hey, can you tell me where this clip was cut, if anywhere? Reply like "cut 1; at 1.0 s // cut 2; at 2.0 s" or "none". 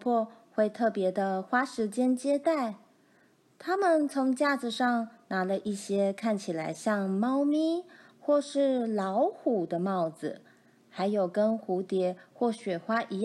none